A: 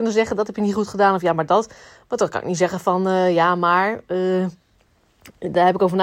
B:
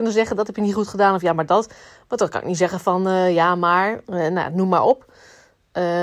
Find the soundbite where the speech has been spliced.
B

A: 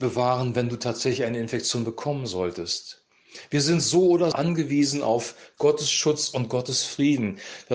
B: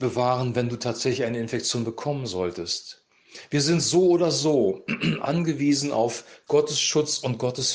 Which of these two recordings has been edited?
A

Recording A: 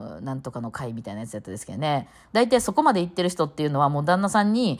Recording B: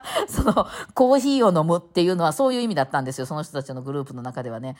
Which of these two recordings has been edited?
A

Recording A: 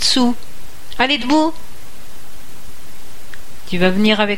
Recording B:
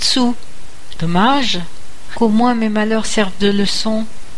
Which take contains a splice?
B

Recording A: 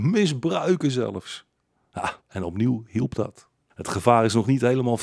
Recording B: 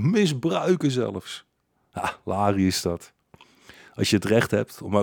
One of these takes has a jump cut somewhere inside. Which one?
A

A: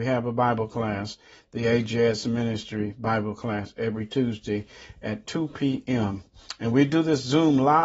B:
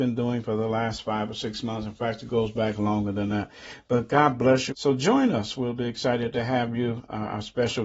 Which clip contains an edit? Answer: B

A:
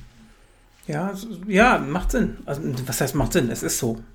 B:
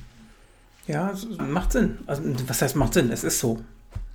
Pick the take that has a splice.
B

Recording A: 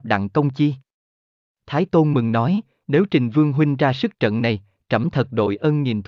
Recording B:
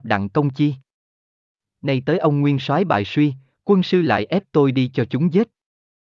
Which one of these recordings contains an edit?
A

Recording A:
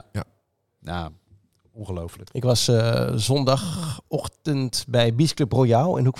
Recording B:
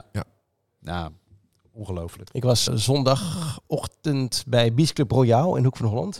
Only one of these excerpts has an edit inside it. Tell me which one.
B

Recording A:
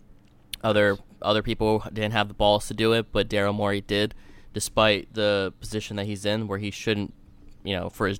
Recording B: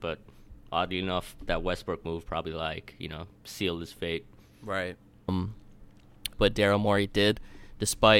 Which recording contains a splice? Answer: B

